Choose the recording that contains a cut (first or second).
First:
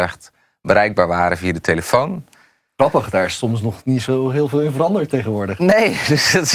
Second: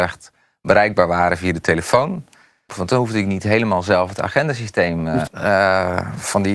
second